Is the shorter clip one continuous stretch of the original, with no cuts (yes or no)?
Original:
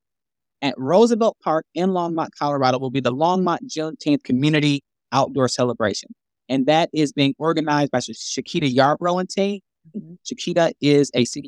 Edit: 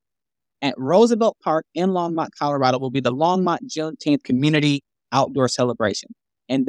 yes